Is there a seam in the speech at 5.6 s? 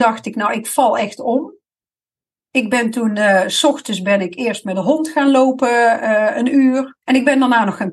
no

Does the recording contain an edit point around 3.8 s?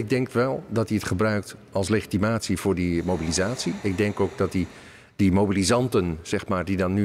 no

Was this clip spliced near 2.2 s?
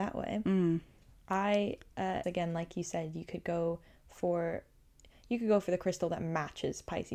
yes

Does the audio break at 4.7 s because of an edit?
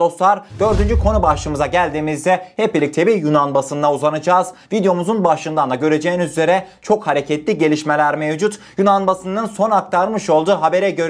no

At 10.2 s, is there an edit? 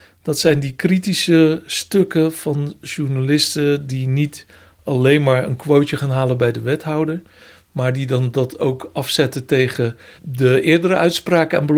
yes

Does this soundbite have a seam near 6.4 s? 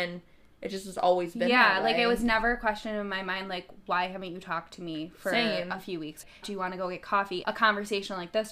yes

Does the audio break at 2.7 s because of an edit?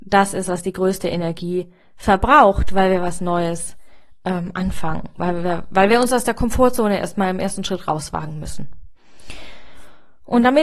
no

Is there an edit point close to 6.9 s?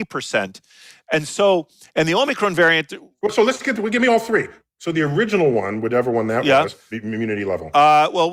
yes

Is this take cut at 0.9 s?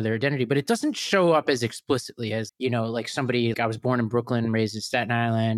no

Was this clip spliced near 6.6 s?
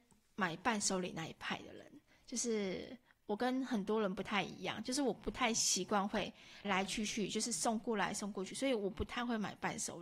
yes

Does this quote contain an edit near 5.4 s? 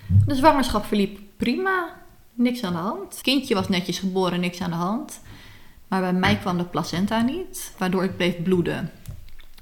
no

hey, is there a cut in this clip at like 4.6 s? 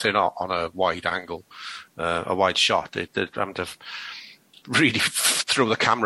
yes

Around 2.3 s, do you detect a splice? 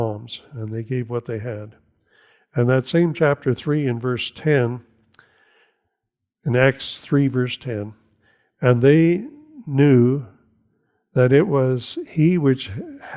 no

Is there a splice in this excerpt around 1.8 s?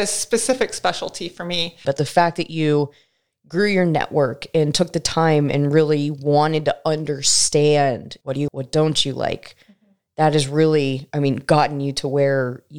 yes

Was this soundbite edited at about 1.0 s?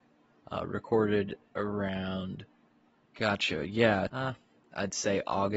no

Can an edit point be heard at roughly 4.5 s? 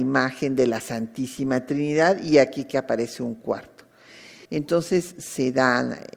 yes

